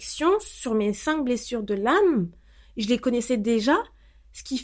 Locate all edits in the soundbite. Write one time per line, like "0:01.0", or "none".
none